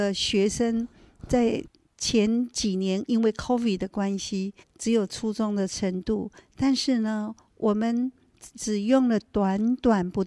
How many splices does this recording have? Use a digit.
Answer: 1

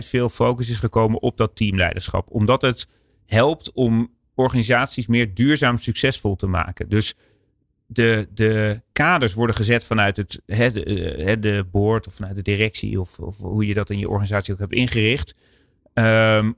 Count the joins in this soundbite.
0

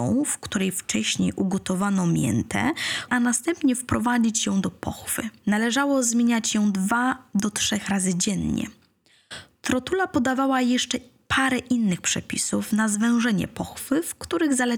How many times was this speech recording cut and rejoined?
1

